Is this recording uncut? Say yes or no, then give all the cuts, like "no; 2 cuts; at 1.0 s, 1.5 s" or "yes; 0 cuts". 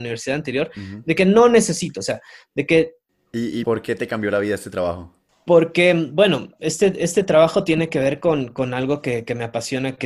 no; 1 cut; at 3.6 s